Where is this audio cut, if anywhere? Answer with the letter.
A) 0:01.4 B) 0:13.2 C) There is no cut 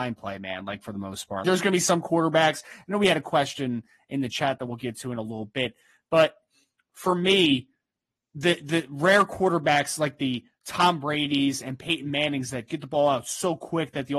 A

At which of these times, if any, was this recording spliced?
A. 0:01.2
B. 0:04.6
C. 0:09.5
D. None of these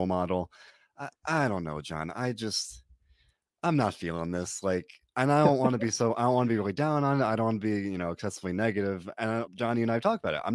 C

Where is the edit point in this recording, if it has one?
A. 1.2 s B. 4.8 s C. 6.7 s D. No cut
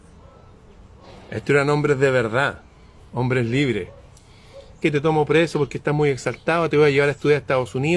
B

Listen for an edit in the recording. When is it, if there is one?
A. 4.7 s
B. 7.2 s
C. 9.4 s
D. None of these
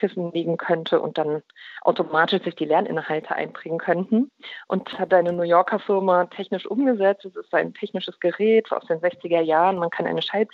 D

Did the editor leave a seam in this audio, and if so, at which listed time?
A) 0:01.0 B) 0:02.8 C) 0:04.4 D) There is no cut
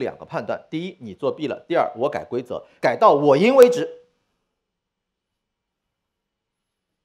B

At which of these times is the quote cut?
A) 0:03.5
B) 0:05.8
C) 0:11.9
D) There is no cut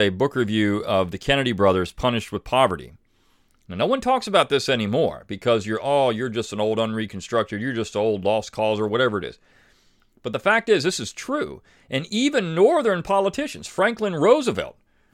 A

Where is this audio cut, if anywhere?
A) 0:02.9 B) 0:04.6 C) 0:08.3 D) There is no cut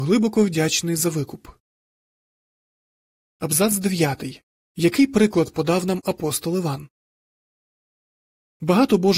B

